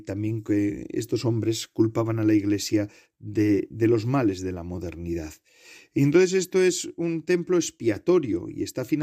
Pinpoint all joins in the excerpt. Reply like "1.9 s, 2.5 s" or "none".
none